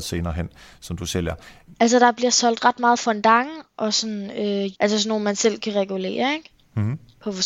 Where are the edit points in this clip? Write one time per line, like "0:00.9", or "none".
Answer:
0:01.7
0:04.7

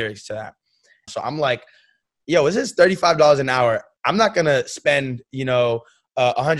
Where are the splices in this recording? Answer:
0:01.1

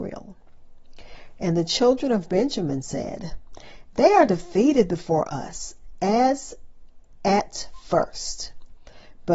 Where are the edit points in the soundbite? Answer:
none

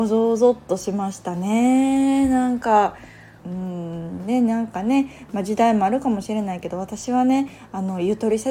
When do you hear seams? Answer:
0:03.4

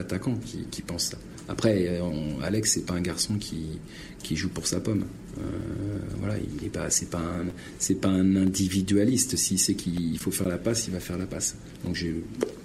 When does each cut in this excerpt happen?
none

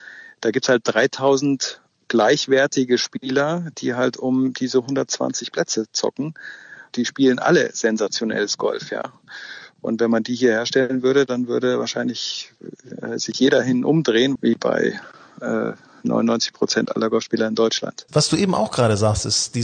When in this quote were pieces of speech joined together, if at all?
0:14.4
0:18.1

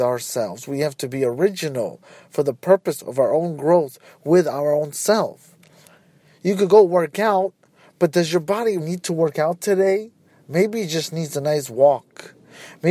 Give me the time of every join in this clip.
0:08.8

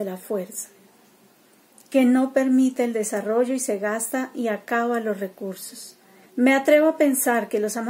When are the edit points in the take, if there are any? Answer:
0:06.2

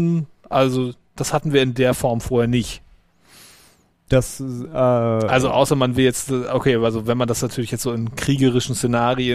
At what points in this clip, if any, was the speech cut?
none

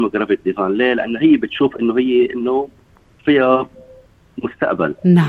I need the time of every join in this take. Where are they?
none

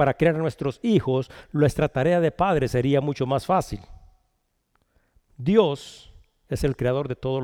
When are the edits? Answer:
none

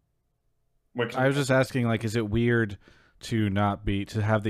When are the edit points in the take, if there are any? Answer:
0:01.1

